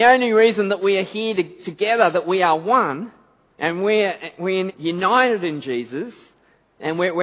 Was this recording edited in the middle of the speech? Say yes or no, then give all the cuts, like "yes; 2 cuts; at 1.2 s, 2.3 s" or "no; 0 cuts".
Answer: yes; 2 cuts; at 3.5 s, 4.7 s